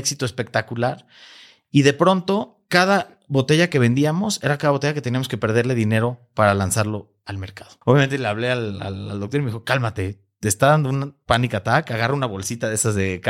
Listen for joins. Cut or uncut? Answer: cut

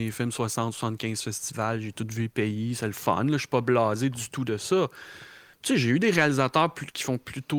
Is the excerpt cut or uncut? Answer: cut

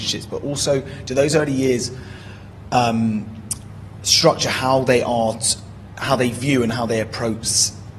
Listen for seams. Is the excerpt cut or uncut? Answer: uncut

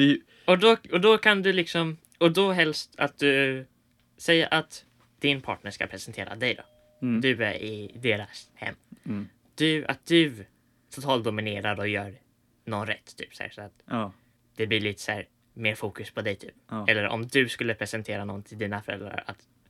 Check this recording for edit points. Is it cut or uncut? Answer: uncut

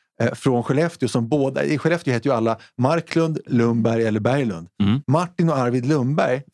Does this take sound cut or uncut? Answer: cut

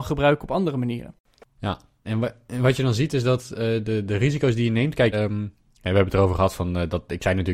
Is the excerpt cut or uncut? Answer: cut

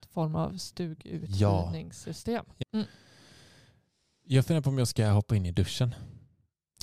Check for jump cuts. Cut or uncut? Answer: cut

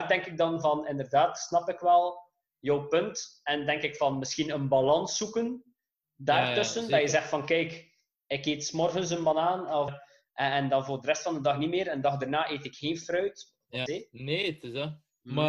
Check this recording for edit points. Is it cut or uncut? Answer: cut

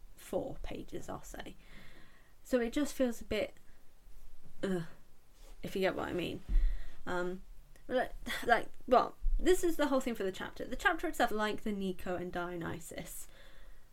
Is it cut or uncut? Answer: cut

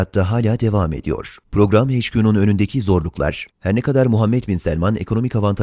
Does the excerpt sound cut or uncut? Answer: cut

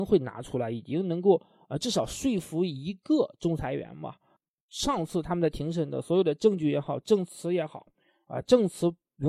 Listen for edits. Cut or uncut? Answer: uncut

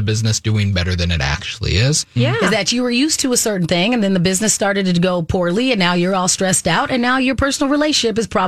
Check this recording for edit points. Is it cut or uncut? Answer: cut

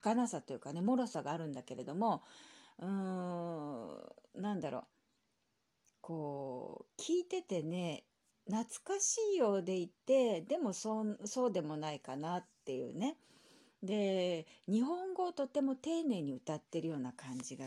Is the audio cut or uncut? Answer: uncut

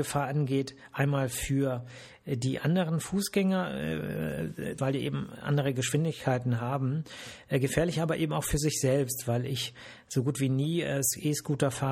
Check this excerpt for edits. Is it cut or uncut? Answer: cut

